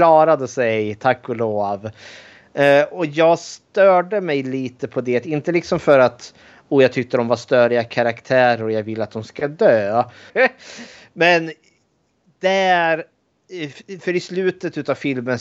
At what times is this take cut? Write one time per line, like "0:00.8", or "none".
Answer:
0:10.3

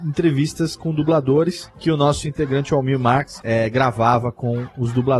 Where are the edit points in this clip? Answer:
0:03.4

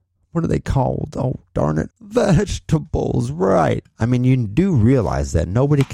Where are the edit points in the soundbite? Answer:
0:01.9
0:03.8

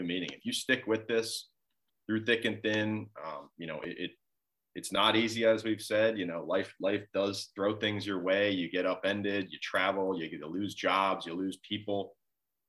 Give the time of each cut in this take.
none

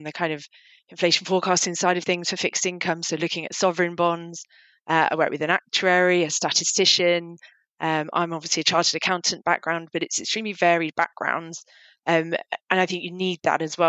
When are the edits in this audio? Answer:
none

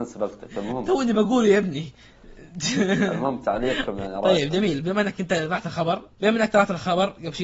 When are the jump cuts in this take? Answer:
0:06.1

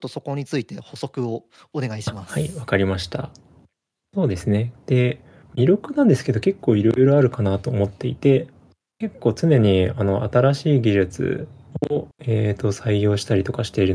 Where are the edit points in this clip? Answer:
0:04.8
0:12.1

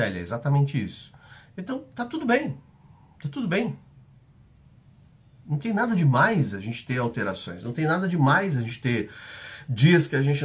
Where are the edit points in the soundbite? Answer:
none

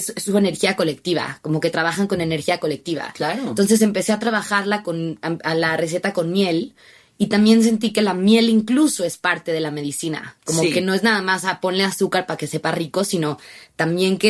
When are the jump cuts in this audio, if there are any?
none

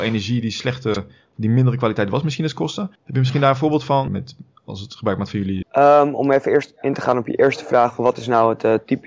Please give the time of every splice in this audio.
0:03.0
0:04.1
0:05.6

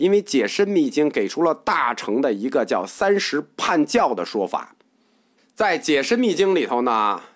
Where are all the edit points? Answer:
0:05.4

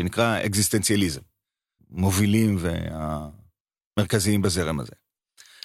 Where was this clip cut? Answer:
0:01.8

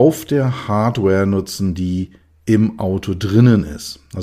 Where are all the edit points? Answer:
none

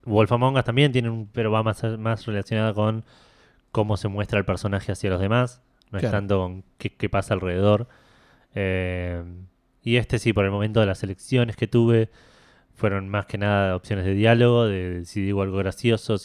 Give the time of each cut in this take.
0:01.3

